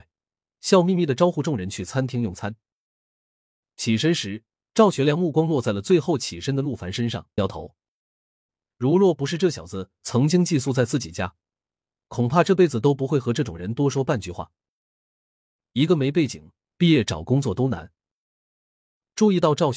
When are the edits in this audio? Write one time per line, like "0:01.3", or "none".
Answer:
0:07.4
0:16.6